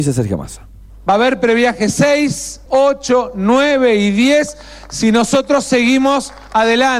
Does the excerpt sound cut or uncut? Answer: cut